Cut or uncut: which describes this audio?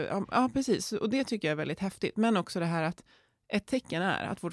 uncut